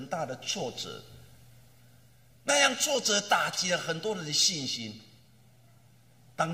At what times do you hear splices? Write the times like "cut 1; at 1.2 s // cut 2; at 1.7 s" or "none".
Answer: none